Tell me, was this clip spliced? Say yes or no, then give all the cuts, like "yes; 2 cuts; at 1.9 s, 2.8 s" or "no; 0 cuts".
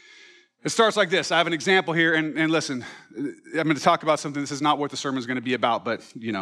no; 0 cuts